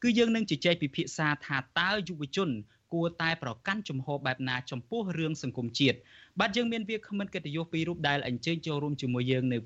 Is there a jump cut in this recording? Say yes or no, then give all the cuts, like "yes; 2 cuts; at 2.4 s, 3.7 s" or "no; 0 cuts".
no; 0 cuts